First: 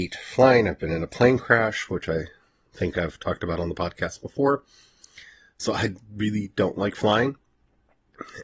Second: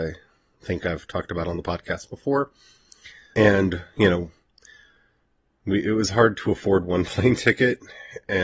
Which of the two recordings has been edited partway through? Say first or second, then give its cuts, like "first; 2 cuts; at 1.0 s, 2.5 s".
second; 1 cut; at 3.3 s